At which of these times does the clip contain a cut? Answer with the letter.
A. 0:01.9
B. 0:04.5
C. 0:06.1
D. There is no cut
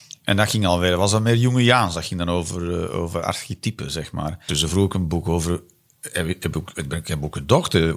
B